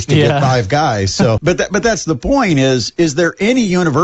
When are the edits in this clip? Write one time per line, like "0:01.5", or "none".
0:01.4